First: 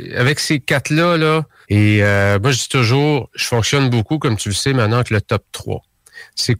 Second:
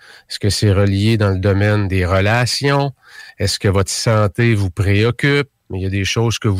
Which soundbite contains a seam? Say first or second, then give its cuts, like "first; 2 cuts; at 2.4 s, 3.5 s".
first; 1 cut; at 1.6 s